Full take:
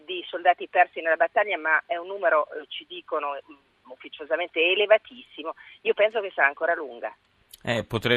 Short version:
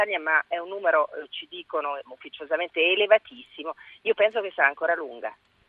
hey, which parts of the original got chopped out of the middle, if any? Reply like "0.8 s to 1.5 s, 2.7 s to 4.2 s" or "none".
3.4 s to 3.8 s